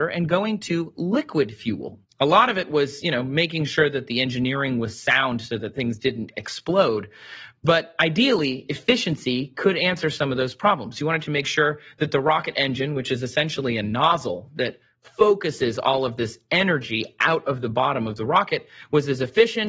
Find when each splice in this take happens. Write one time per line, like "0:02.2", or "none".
0:02.0